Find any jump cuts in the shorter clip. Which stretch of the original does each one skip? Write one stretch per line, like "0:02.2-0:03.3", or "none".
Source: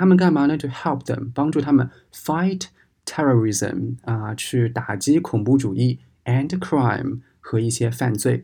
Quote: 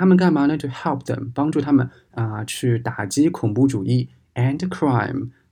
0:02.1-0:04.0